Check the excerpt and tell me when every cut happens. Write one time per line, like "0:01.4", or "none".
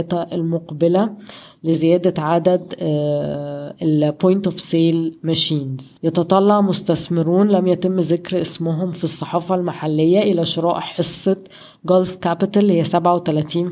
0:06.0